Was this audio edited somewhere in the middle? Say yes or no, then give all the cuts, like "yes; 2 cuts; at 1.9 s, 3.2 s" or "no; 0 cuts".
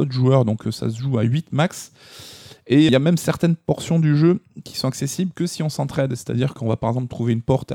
yes; 1 cut; at 2.9 s